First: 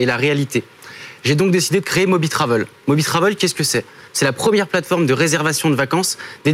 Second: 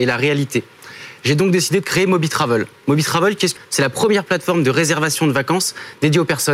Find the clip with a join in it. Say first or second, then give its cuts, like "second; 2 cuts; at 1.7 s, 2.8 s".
second; 1 cut; at 3.6 s